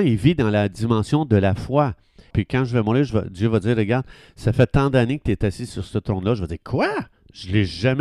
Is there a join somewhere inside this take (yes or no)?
yes